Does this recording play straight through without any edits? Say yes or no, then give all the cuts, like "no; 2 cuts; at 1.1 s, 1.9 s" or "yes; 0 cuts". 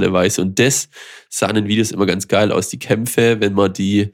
yes; 0 cuts